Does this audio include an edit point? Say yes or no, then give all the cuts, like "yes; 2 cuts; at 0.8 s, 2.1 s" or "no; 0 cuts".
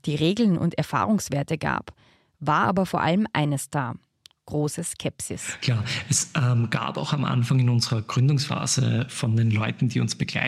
no; 0 cuts